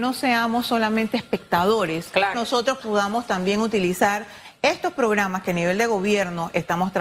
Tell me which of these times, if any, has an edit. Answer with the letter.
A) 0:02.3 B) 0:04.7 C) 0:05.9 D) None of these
A